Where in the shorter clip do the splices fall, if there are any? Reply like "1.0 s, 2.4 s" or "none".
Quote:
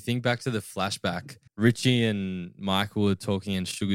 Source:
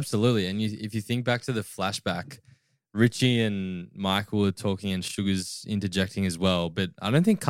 1.5 s